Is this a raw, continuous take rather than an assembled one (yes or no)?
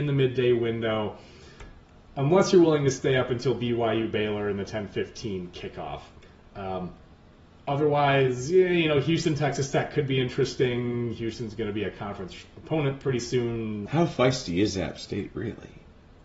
no